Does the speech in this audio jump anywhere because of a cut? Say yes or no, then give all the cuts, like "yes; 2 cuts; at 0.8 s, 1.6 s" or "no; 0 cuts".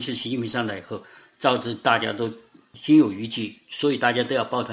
no; 0 cuts